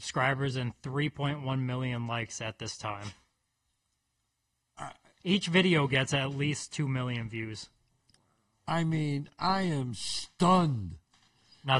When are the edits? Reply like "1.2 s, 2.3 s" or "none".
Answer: none